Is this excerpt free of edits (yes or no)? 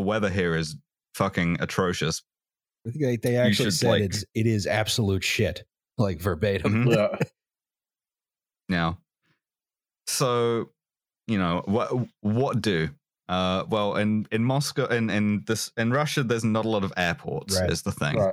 yes